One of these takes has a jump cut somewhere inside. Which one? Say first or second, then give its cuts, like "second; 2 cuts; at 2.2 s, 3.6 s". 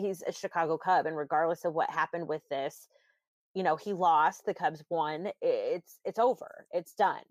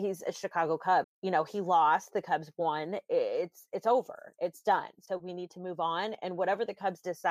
second; 1 cut; at 1.0 s